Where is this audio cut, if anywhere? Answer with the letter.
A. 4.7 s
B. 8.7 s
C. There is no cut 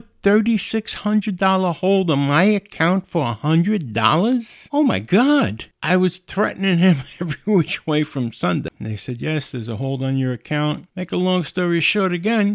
B